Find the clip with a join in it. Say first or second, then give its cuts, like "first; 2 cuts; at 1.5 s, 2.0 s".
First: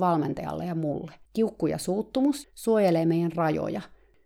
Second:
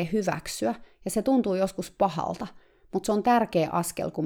first; 2 cuts; at 1.2 s, 2.4 s